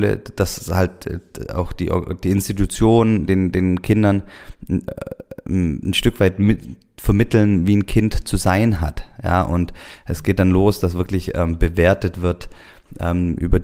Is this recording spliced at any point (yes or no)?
no